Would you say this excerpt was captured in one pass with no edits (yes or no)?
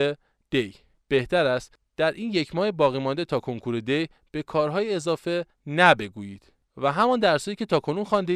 no